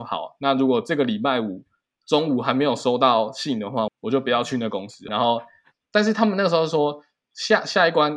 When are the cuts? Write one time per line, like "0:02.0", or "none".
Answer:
0:03.9
0:05.1